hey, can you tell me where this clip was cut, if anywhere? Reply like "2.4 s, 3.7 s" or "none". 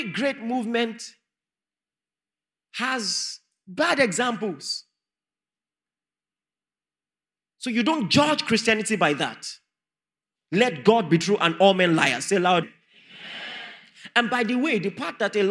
10.3 s, 12.6 s